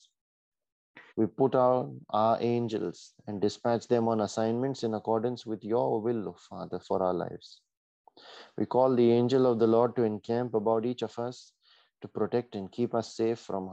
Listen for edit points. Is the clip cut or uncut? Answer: cut